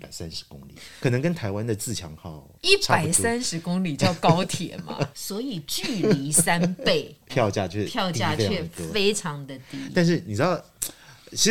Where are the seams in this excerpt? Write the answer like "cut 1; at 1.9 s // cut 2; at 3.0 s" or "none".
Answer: cut 1; at 2.5 s // cut 2; at 5.1 s // cut 3; at 7.3 s